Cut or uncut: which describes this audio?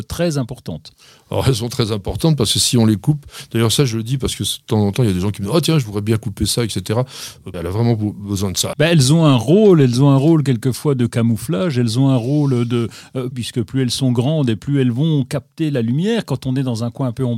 cut